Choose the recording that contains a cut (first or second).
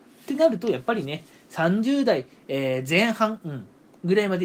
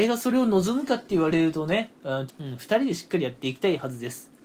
second